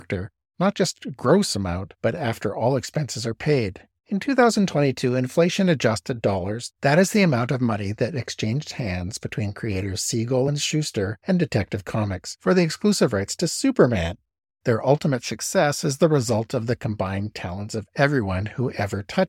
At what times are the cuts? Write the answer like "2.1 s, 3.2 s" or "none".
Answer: 4.0 s, 14.5 s